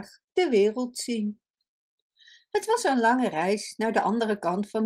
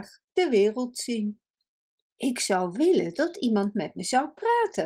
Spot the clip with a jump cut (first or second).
second